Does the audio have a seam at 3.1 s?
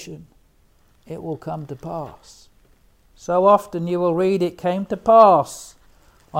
yes; 1 cut; at 3.1 s

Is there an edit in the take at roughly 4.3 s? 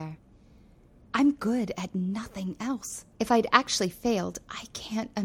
no; 2 cuts; at 1.0 s, 3.1 s

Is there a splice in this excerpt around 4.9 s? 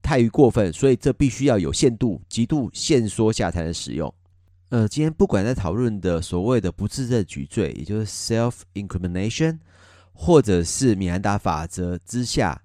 yes; 1 cut; at 4.9 s

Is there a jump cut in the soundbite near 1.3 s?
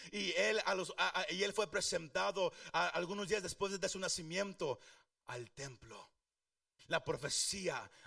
no; 1 cut; at 6.8 s

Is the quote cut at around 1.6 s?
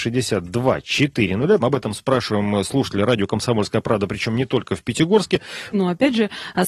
yes; 2 cuts; at 1.6 s, 5.7 s

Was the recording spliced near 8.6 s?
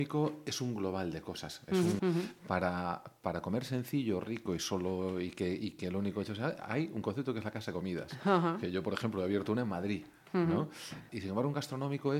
no; 2 cuts; at 2.0 s, 11.1 s

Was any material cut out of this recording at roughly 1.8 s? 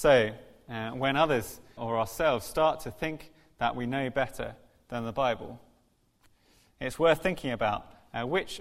yes; 1 cut; at 1.8 s

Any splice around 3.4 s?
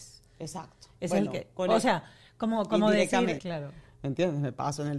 yes; 1 cut; at 3.4 s

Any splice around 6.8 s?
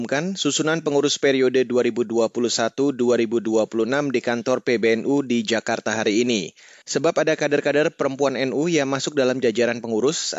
yes; 1 cut; at 6.8 s

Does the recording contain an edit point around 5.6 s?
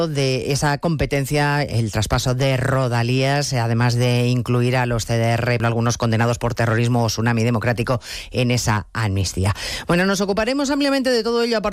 yes; 1 cut; at 5.6 s

